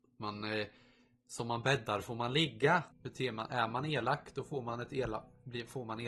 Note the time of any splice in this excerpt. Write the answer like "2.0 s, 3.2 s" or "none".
2.9 s